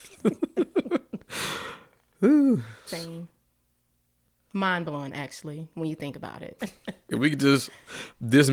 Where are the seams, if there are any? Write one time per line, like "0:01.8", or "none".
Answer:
0:02.9
0:06.6